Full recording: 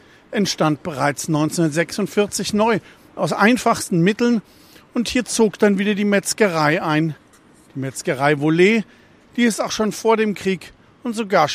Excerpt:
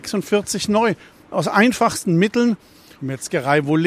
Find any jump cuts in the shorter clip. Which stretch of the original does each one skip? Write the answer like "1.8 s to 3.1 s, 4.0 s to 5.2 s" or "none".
4.8 s to 7.7 s